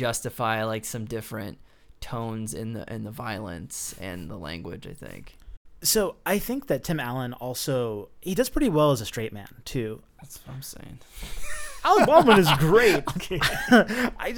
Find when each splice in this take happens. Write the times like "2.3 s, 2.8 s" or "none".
10.1 s, 13.2 s